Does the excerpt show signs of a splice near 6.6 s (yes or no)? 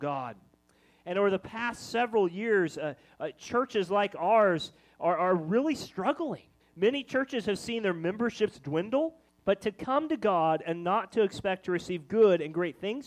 yes